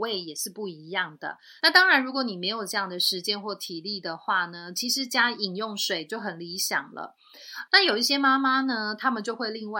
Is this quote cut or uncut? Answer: cut